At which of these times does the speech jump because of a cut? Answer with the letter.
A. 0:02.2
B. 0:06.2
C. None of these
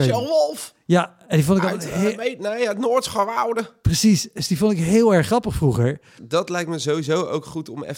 B